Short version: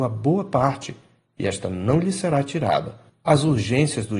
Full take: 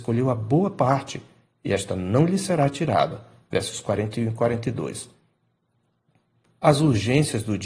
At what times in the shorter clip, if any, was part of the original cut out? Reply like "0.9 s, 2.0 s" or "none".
3.1 s

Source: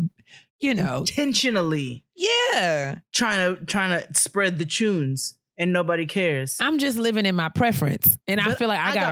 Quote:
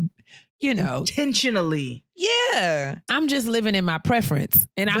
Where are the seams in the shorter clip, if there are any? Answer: 3.1 s

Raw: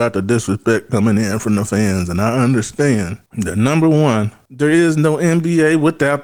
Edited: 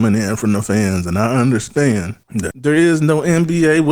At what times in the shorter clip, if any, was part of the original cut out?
2.5 s

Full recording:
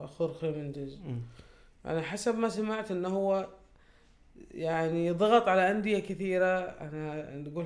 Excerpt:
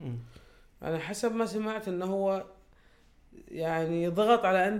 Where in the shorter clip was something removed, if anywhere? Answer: none

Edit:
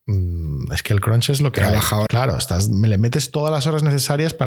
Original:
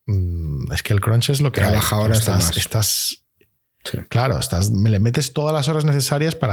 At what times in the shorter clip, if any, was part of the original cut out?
2.1 s

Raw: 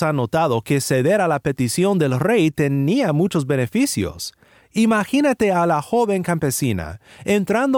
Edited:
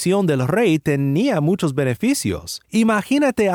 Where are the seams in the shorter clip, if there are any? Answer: 2.6 s

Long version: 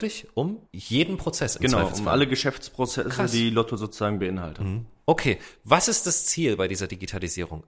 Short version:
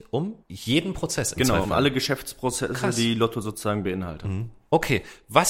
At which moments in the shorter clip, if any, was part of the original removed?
1.6 s

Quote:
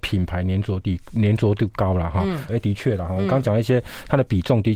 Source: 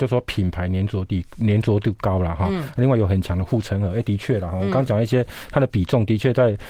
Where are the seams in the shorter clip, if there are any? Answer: 2.5 s

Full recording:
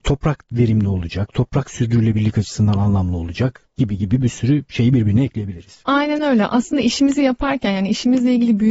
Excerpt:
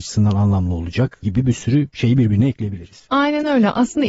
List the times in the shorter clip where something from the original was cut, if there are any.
1.2 s

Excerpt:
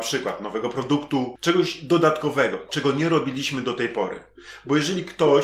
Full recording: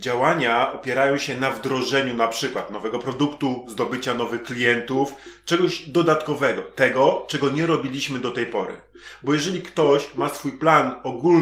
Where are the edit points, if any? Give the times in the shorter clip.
1.4 s, 2.7 s

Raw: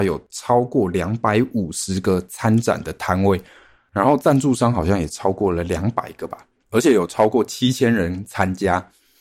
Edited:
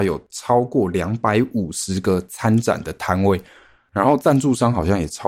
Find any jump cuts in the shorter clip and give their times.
none

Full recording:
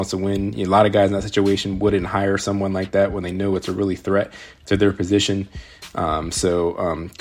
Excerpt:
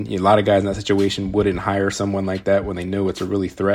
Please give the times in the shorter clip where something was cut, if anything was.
none

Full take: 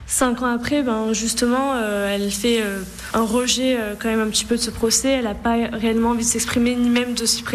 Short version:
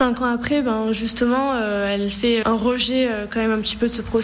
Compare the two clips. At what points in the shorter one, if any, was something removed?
2.4 s

